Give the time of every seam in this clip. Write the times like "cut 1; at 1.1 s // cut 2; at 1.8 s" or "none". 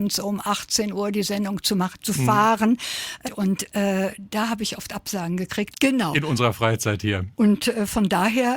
cut 1; at 3.2 s // cut 2; at 5.7 s // cut 3; at 7.3 s

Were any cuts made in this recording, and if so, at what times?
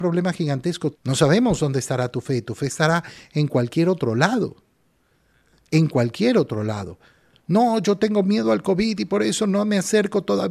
cut 1; at 0.9 s

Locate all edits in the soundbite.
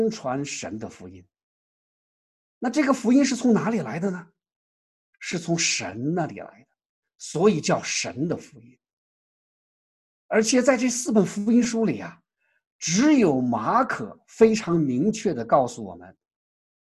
none

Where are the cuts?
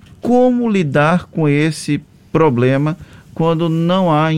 none

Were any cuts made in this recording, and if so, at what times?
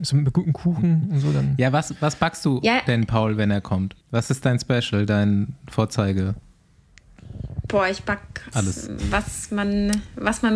cut 1; at 4.0 s // cut 2; at 8.5 s

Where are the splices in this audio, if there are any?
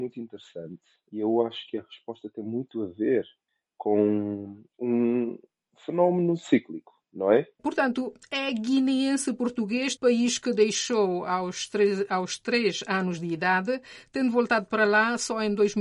cut 1; at 7.6 s // cut 2; at 10.0 s

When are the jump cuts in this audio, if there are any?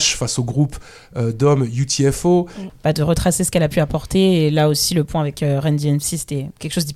cut 1; at 2.7 s

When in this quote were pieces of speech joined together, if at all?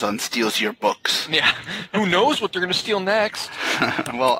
none

